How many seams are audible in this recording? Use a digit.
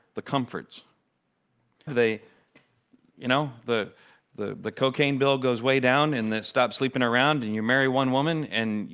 1